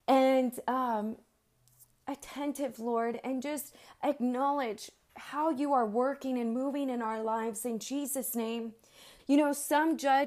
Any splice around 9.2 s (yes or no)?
yes